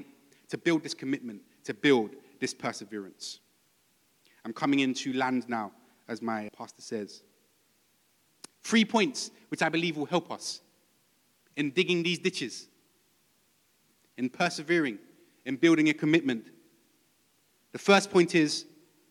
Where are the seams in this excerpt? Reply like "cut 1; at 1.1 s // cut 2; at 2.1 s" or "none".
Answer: cut 1; at 6.5 s

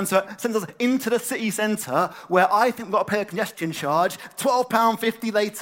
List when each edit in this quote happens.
none

